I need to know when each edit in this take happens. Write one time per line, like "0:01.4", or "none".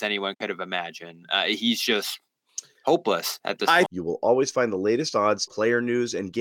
0:03.9
0:05.5